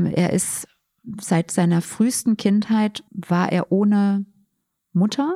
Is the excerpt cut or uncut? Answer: cut